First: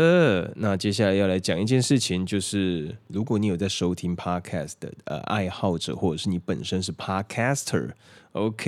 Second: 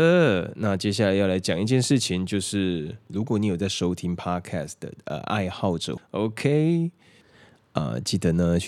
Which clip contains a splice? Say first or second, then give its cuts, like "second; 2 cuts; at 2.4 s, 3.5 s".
second; 1 cut; at 6.0 s